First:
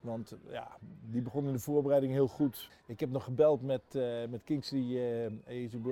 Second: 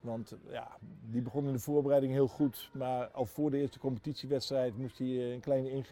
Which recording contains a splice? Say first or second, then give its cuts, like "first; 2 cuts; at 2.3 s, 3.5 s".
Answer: first; 1 cut; at 2.7 s